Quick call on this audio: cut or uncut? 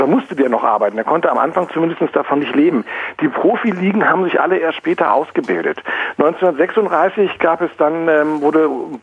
uncut